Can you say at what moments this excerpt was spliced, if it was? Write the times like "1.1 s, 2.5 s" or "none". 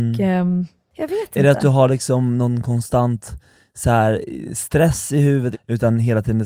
5.5 s